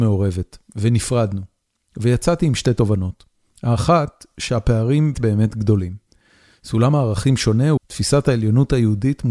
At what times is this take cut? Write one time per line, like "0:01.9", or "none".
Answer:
0:05.1
0:07.8